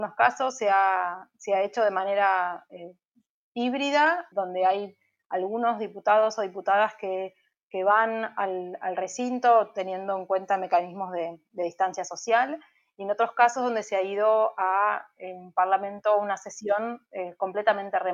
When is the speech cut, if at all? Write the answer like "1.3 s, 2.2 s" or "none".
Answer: 4.3 s